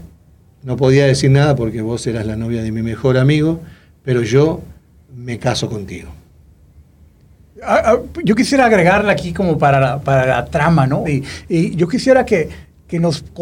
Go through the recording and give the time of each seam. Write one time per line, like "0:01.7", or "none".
0:07.6
0:11.0